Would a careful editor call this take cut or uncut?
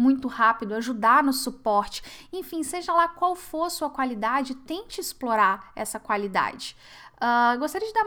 uncut